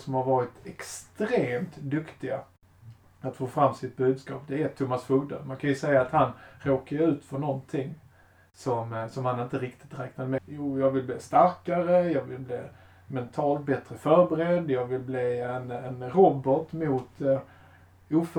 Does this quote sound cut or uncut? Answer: cut